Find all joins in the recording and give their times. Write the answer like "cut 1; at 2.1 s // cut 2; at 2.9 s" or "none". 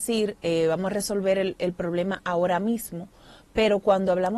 none